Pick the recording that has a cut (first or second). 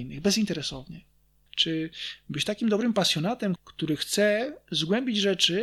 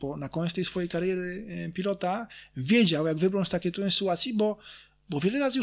first